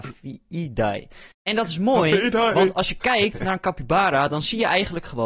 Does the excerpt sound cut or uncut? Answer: cut